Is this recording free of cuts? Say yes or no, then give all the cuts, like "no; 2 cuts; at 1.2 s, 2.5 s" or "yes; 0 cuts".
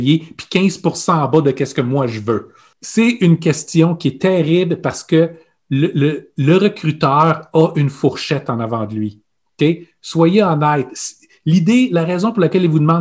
yes; 0 cuts